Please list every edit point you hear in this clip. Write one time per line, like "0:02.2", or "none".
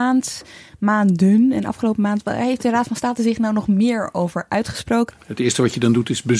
0:02.2
0:05.1